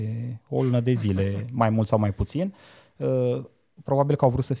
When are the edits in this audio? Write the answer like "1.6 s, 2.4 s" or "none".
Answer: none